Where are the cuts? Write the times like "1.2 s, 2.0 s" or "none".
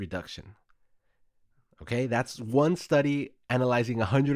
none